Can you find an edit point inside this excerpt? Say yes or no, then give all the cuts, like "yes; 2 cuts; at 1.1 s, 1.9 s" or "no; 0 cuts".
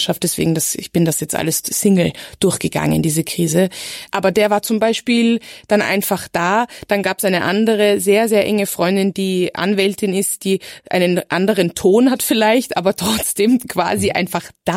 no; 0 cuts